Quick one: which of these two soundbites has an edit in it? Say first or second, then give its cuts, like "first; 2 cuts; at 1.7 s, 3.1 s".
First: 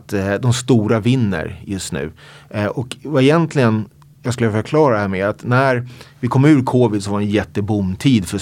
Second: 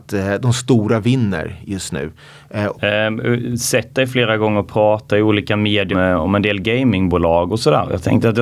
second; 2 cuts; at 2.7 s, 5.9 s